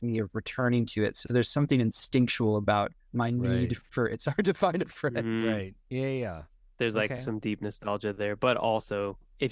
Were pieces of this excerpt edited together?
no; 0 cuts

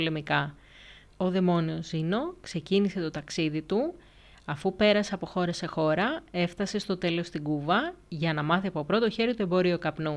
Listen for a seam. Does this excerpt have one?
yes; 1 cut; at 1.1 s

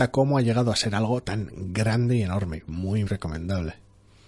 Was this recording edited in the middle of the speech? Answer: yes; 1 cut; at 3.1 s

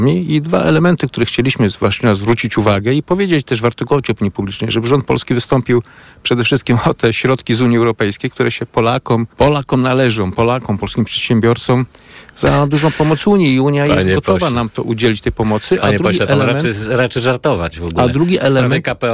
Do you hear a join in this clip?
yes; 1 cut; at 9.3 s

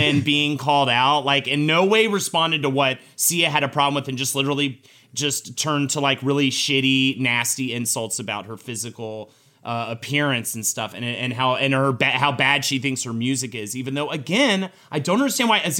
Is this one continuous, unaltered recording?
yes; 0 cuts

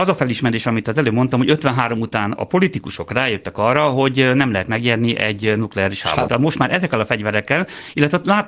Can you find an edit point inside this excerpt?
yes; 1 cut; at 6.3 s

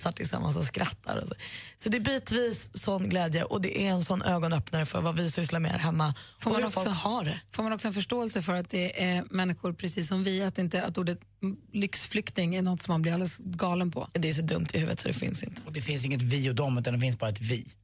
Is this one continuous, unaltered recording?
yes; 0 cuts

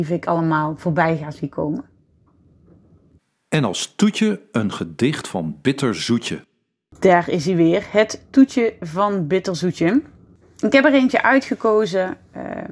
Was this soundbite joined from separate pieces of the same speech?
no; 0 cuts

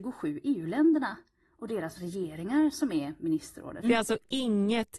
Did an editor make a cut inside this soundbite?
yes; 1 cut; at 3.8 s

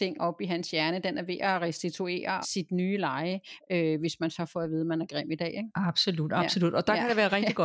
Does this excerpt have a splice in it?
yes; 2 cuts; at 2.4 s, 3.6 s

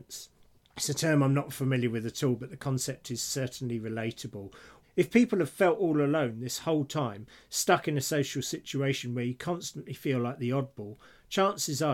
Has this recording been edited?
yes; 1 cut; at 4.8 s

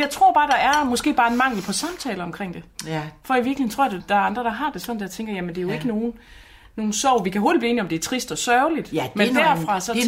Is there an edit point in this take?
yes; 1 cut; at 4.0 s

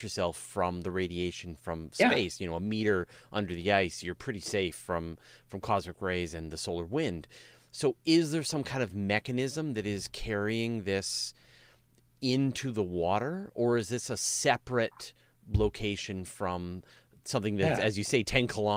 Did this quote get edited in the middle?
no; 0 cuts

